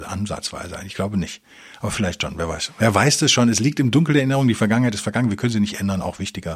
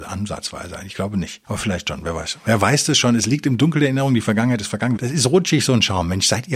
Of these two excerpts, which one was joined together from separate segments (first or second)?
second